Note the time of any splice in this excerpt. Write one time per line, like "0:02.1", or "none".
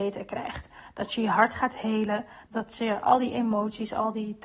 0:02.5

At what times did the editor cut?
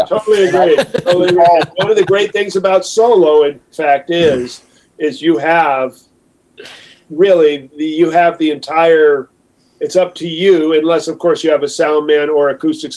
none

